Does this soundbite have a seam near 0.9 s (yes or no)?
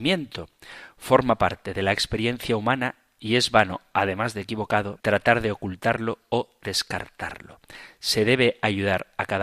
no